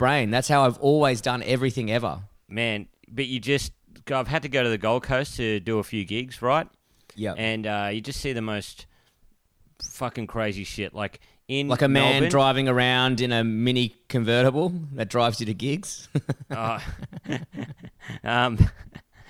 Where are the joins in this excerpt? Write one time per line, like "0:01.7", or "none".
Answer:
none